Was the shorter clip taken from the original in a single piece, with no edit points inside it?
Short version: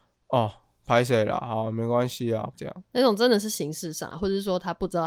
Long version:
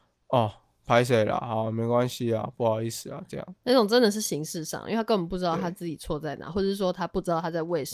no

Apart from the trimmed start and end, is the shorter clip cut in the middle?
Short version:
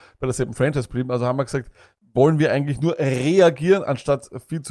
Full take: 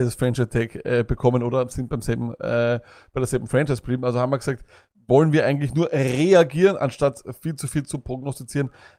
no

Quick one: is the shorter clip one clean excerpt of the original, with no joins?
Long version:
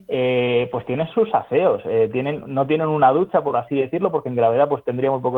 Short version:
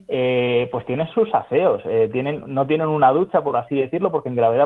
yes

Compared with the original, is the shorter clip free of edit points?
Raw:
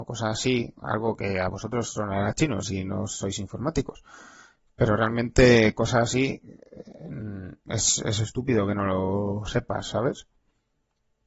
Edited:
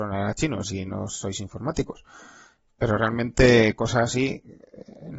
yes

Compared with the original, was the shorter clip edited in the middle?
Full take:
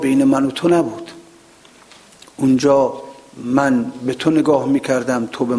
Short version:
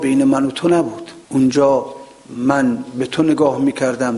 yes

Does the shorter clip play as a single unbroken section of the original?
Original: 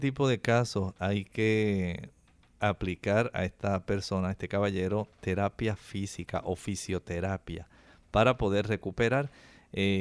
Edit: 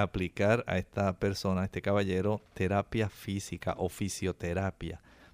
yes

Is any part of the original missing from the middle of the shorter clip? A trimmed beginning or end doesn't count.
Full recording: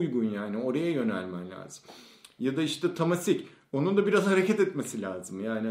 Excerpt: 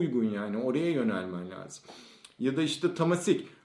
no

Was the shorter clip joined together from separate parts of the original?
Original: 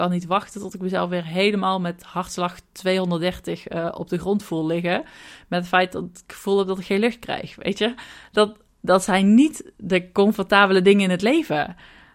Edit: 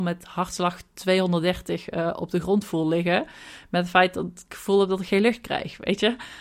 no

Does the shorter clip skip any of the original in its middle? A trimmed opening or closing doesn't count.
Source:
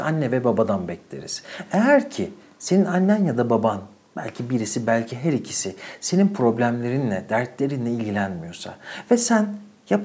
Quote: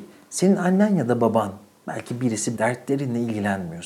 yes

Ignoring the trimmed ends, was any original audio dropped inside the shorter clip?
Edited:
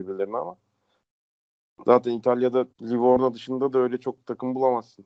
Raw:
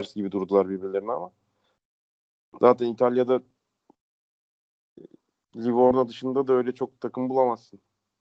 yes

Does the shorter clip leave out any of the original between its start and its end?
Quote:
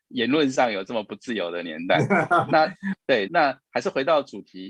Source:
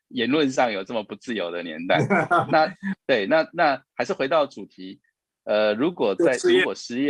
yes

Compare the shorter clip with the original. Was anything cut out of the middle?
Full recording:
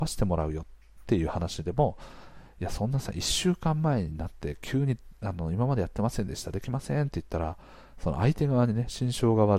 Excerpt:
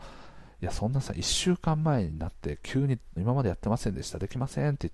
yes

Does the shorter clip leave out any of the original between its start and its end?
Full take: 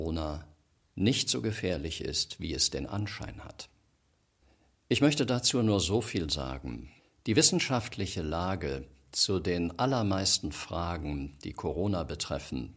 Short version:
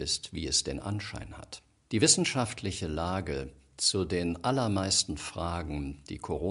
yes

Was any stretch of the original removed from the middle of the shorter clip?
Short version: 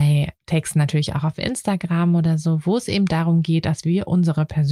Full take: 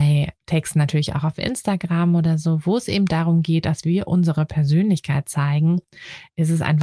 no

